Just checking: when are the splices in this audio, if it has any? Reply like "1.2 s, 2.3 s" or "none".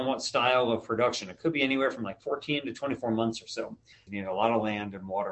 4.1 s